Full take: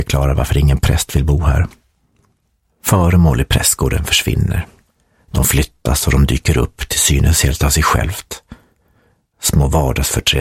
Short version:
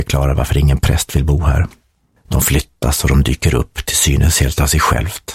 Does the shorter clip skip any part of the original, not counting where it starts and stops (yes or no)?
yes